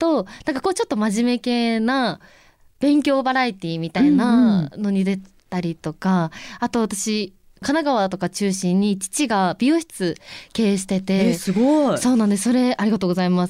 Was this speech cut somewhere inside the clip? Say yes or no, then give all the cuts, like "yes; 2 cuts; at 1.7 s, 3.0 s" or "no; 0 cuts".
no; 0 cuts